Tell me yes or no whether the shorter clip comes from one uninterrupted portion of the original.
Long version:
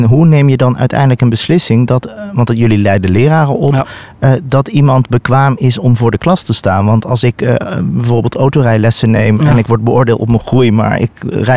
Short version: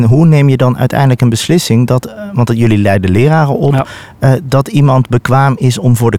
yes